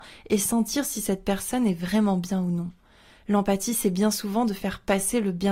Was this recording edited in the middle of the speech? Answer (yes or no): no